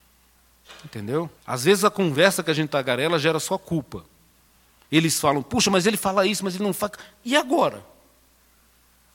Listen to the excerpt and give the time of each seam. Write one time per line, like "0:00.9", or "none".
0:01.4
0:04.8